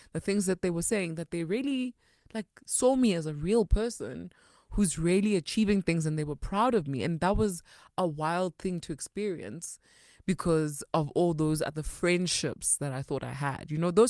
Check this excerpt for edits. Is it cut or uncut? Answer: uncut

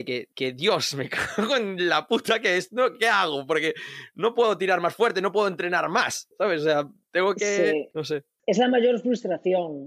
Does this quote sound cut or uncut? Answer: uncut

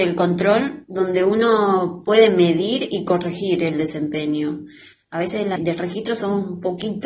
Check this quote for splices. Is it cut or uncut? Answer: cut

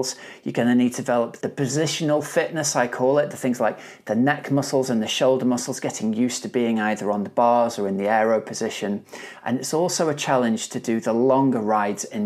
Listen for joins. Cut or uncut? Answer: cut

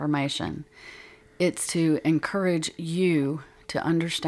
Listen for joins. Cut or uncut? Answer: uncut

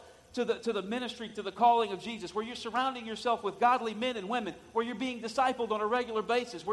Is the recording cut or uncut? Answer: uncut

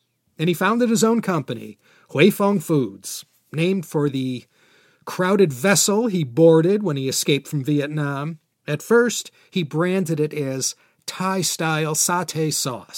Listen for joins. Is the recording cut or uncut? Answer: cut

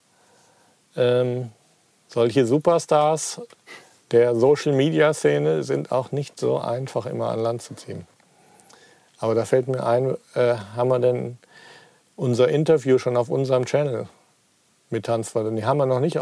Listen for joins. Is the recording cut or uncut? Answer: uncut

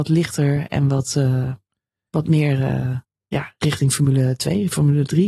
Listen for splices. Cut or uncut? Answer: uncut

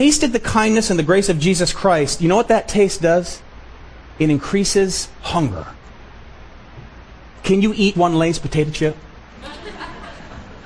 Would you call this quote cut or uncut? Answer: cut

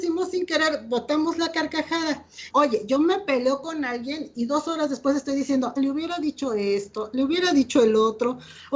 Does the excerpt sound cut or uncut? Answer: cut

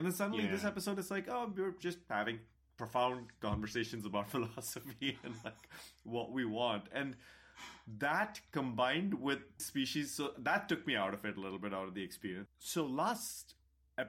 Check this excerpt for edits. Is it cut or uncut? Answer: cut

